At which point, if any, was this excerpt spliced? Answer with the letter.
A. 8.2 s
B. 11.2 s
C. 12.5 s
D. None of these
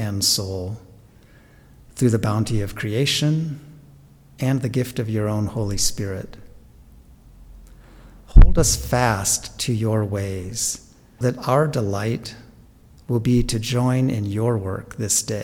B